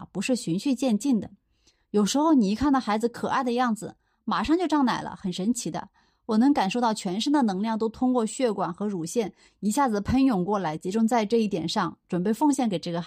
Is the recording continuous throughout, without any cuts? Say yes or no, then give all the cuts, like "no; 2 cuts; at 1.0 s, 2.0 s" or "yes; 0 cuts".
yes; 0 cuts